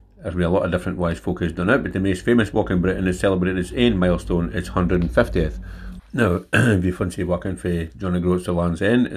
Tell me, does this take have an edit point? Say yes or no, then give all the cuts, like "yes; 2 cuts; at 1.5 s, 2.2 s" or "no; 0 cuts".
yes; 1 cut; at 6.0 s